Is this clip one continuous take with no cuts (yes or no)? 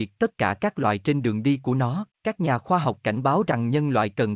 no